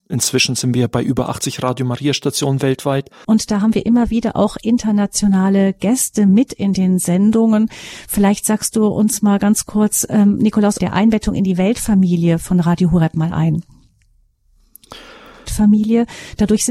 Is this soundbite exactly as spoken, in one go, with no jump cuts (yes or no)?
no